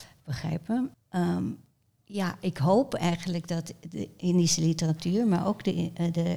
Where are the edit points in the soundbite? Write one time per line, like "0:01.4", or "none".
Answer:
0:00.9